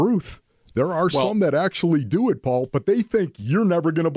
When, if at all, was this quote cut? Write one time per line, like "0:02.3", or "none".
none